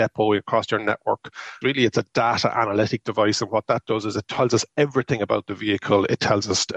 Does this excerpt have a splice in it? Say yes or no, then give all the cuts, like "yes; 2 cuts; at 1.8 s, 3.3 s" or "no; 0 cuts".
yes; 1 cut; at 1.6 s